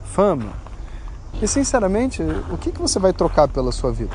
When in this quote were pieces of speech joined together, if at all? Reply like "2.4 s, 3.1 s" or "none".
1.3 s